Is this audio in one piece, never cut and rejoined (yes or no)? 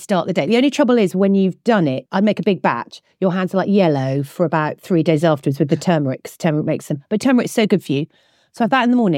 no